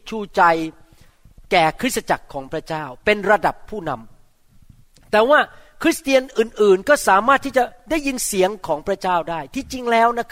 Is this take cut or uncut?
uncut